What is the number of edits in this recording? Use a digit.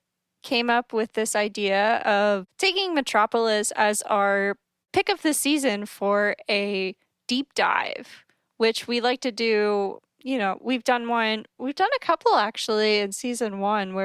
0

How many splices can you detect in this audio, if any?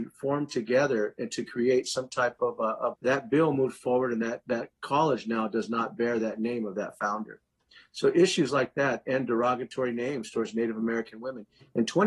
1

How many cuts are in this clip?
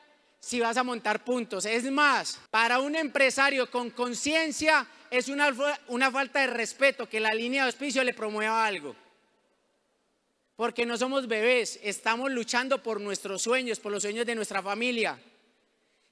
1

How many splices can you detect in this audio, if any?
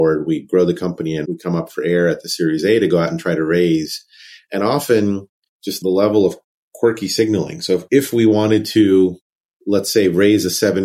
1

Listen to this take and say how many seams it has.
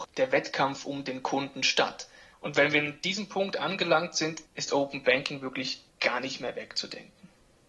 2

